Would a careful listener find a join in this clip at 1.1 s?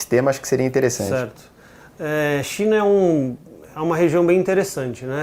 no; 0 cuts

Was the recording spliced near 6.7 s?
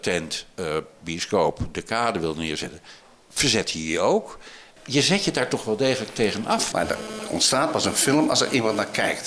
yes; 2 cuts; at 4.8 s, 6.7 s

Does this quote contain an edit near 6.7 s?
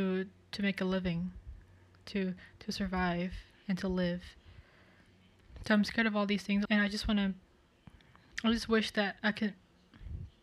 yes; 1 cut; at 6.7 s

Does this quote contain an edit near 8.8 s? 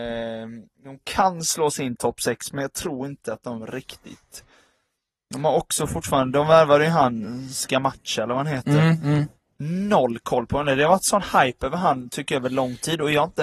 no; 0 cuts

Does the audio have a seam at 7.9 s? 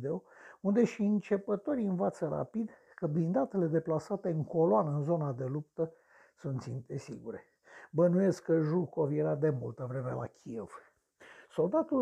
no; 0 cuts

